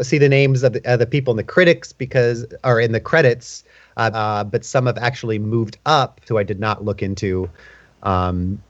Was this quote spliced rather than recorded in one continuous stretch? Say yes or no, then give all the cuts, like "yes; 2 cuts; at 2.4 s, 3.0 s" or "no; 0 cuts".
yes; 2 cuts; at 4.1 s, 6.3 s